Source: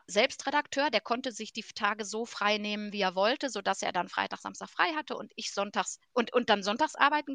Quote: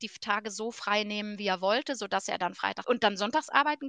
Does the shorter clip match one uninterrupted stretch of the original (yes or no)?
no